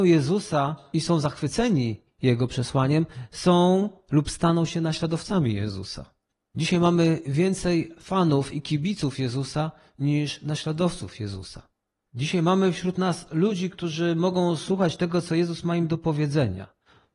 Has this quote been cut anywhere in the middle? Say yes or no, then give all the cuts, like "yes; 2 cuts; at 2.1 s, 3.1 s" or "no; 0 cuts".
no; 0 cuts